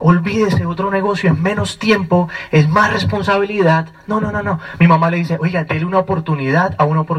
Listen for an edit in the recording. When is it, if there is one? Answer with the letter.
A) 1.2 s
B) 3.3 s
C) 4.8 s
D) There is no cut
D